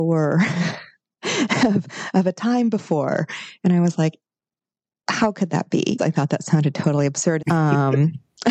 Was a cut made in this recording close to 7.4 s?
yes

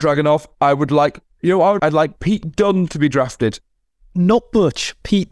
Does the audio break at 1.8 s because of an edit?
yes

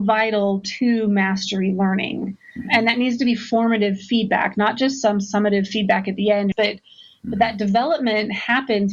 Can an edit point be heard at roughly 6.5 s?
yes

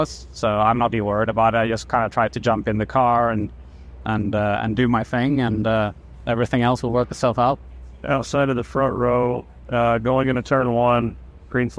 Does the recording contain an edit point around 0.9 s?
yes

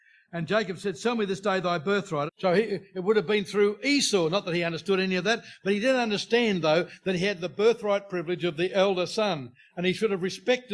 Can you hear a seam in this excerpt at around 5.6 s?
no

